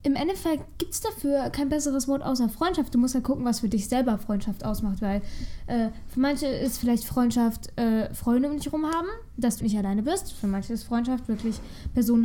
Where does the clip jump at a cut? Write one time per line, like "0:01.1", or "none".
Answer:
0:09.6